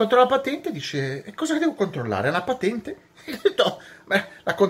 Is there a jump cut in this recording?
no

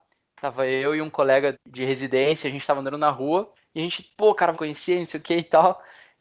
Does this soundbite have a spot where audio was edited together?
yes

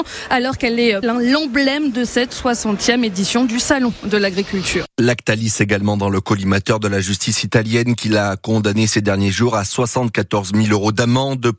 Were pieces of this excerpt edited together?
yes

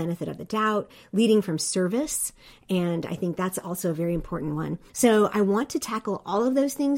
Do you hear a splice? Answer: yes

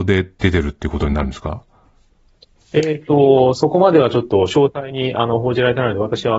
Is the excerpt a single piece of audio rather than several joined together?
yes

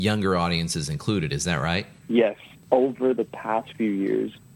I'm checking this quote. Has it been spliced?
yes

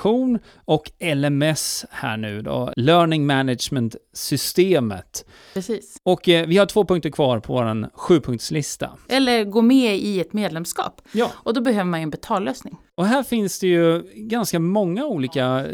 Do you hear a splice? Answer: yes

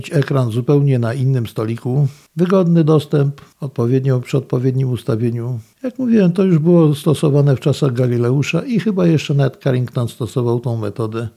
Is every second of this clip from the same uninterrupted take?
no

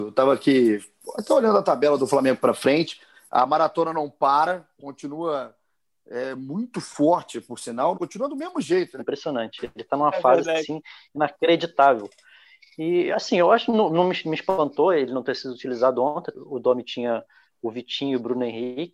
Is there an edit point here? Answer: yes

